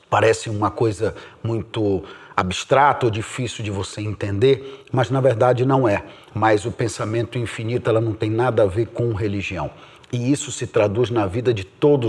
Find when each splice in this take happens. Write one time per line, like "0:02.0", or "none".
0:06.2
0:07.8
0:10.0